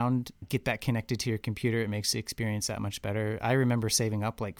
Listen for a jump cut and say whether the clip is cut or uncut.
uncut